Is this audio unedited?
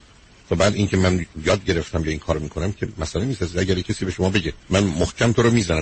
no; 1 cut; at 4.6 s

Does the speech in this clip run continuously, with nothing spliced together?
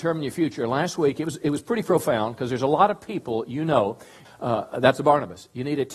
no; 1 cut; at 4.3 s

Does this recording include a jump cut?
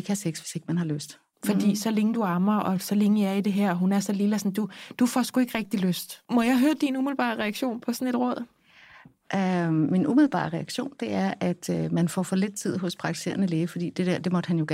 yes; 2 cuts; at 1.3 s, 6.2 s

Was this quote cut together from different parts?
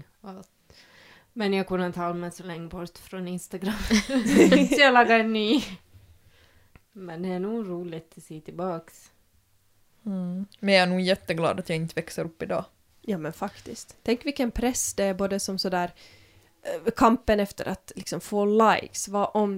no; 0 cuts

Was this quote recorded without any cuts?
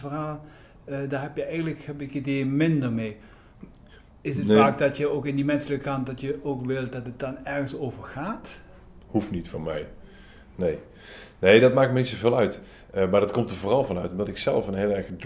yes; 0 cuts

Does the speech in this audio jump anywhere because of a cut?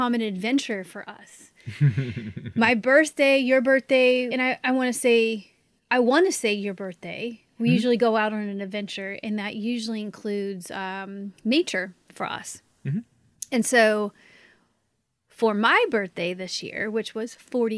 yes; 1 cut; at 4.3 s

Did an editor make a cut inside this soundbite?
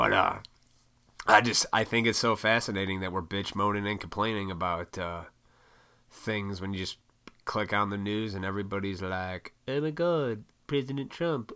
no; 0 cuts

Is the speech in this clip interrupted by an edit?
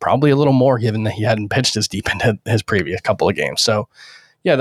no; 0 cuts

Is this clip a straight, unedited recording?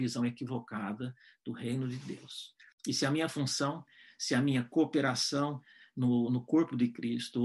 no; 1 cut; at 2.7 s

